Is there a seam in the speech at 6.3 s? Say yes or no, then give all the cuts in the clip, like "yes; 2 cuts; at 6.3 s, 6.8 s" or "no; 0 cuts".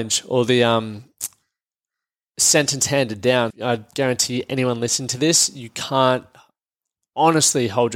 no; 1 cut; at 3.5 s